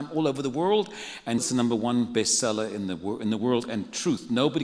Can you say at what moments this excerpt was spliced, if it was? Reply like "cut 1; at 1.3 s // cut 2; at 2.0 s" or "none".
cut 1; at 1.4 s